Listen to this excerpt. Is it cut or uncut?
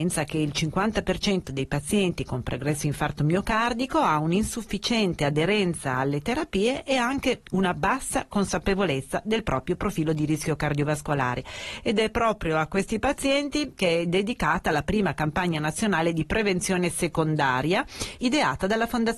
uncut